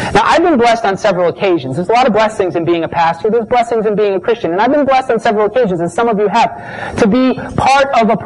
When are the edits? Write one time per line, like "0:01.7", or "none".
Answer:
none